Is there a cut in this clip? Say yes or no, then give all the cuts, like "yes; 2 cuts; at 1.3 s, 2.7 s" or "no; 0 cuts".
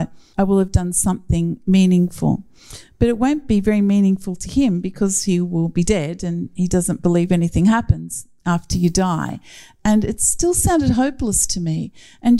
no; 0 cuts